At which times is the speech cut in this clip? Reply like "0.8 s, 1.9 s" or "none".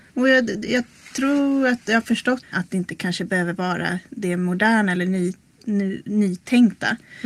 2.4 s